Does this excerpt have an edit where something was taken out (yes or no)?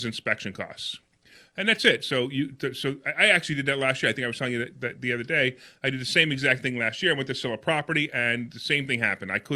no